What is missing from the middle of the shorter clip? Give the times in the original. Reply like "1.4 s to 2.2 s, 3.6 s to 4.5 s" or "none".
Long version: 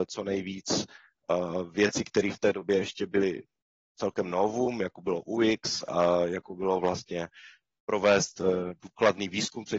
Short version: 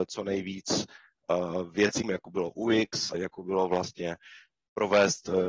2.0 s to 4.7 s, 5.9 s to 6.3 s